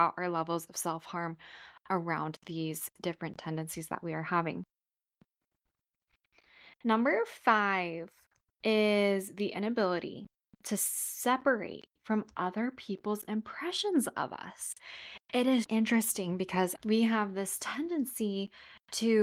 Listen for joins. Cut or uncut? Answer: cut